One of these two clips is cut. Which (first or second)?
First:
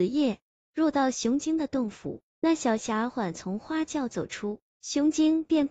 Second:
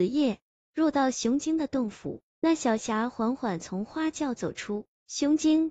first